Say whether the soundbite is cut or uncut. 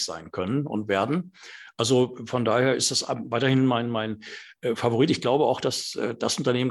uncut